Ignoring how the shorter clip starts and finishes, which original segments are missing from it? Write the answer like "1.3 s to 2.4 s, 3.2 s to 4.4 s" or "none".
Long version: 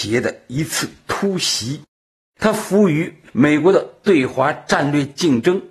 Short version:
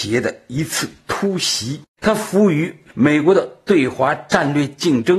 1.9 s to 2.3 s